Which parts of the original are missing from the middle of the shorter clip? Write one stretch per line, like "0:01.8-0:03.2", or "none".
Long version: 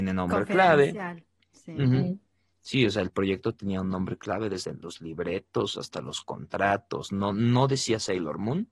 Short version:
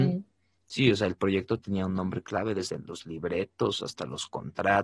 none